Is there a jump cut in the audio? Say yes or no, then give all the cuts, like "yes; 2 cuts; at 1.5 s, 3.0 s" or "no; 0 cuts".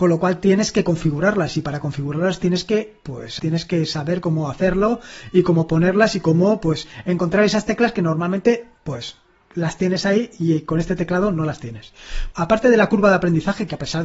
yes; 2 cuts; at 3.4 s, 12.3 s